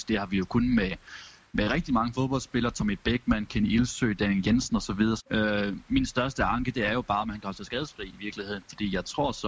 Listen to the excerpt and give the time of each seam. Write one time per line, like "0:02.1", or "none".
0:05.2